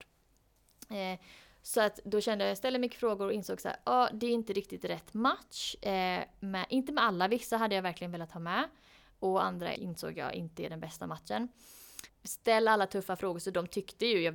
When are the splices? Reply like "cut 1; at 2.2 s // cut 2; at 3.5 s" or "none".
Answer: cut 1; at 9.8 s // cut 2; at 12.1 s